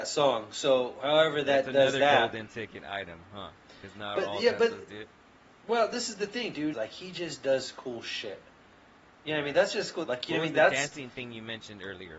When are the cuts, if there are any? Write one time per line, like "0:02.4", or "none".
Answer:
0:06.7
0:10.0